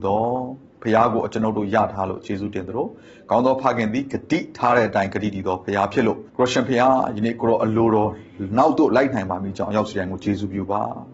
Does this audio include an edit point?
yes; 1 cut; at 6.3 s

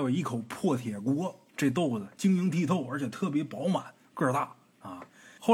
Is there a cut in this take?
yes; 1 cut; at 1.5 s

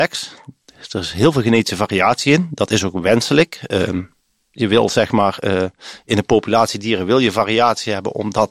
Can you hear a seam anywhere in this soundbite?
no; 0 cuts

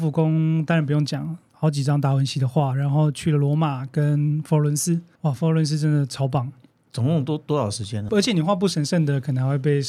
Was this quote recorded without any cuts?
no; 1 cut; at 8.1 s

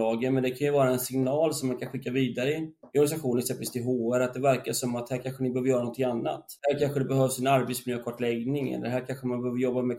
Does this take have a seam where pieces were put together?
no; 0 cuts

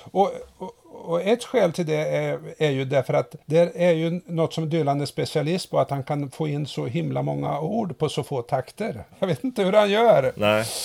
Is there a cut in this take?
yes; 2 cuts; at 3.4 s, 9.1 s

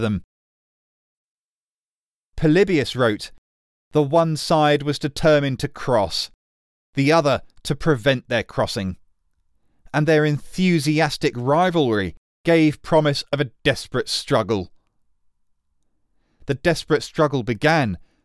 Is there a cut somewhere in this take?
no; 0 cuts

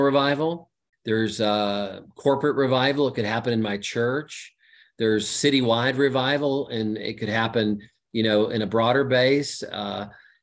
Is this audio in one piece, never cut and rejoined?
no; 1 cut; at 0.9 s

